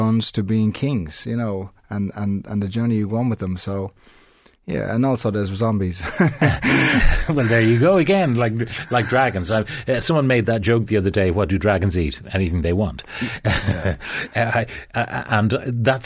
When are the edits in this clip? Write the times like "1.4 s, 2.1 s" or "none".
none